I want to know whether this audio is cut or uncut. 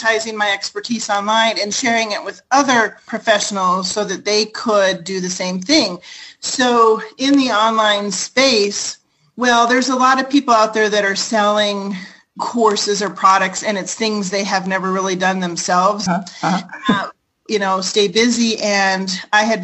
cut